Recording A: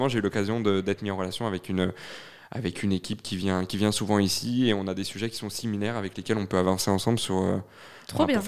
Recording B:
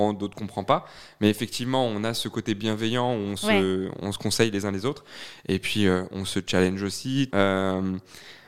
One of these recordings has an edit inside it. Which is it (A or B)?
B